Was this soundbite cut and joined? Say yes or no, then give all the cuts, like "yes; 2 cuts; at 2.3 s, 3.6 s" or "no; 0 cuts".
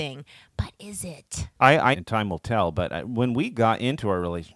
yes; 1 cut; at 1.9 s